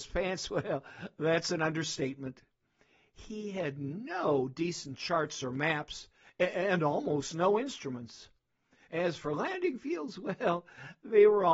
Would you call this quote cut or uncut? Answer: uncut